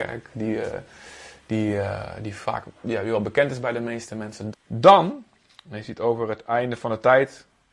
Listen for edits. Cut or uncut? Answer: cut